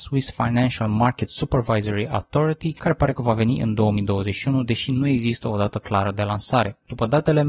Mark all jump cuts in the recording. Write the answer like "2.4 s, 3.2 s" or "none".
none